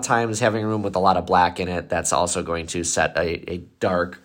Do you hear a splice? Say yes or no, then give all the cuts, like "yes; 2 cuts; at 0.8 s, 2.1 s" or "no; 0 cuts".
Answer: no; 0 cuts